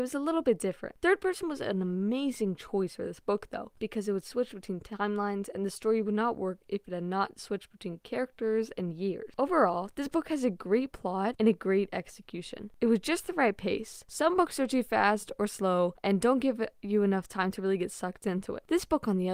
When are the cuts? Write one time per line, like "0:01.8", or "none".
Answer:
none